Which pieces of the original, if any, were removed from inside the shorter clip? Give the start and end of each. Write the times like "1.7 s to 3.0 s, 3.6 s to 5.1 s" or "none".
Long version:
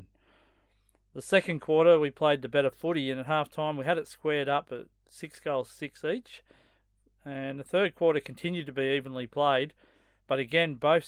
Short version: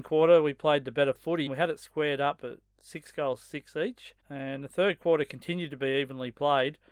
3.0 s to 3.7 s, 6.5 s to 7.2 s